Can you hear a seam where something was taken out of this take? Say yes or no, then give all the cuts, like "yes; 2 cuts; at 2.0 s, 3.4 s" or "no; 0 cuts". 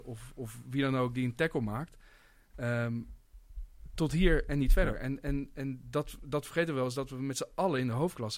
no; 0 cuts